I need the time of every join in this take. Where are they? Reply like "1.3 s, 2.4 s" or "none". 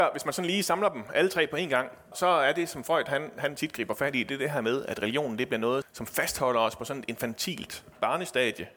2.1 s, 5.8 s